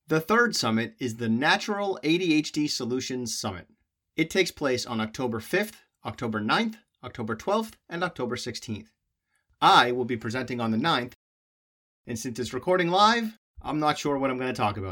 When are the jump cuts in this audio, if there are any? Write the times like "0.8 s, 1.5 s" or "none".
none